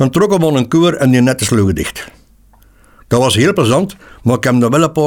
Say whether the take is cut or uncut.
uncut